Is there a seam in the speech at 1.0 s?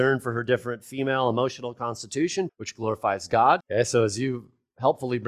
no; 2 cuts; at 2.5 s, 3.6 s

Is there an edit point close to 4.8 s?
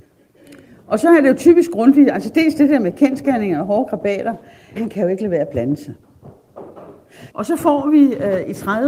yes; 2 cuts; at 4.8 s, 7.3 s

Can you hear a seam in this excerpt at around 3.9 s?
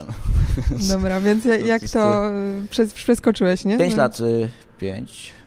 no; 0 cuts

